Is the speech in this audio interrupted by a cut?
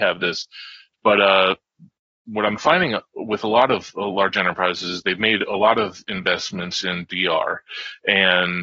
yes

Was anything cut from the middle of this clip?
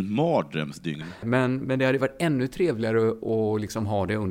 yes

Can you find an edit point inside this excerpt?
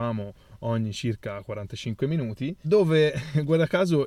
yes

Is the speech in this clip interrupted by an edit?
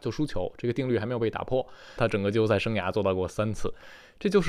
yes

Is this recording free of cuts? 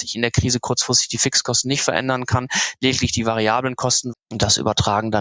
no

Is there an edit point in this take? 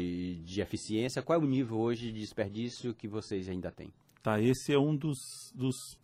no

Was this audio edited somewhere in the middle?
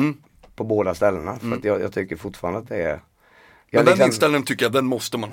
no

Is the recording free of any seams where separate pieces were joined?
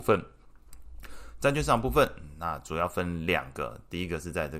yes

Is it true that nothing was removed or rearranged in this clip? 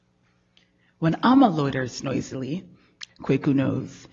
no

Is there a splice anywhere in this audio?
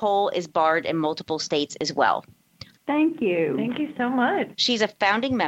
yes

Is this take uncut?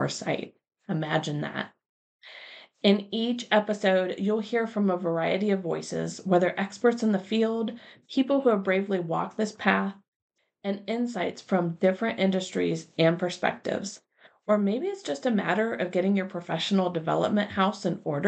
no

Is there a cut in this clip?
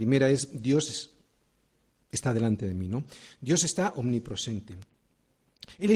no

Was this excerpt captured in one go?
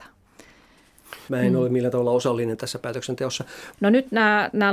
no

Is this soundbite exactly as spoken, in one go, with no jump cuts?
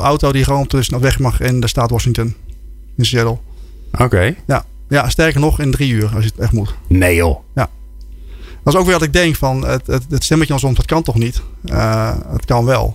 no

